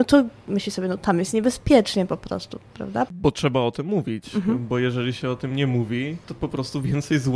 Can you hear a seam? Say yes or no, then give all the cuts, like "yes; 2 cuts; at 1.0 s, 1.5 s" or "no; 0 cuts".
yes; 1 cut; at 3.1 s